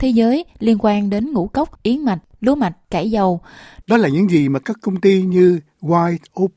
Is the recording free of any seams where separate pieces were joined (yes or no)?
no